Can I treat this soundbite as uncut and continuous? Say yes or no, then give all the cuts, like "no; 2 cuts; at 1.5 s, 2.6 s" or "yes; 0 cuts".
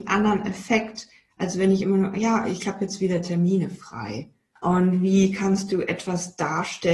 no; 1 cut; at 4.6 s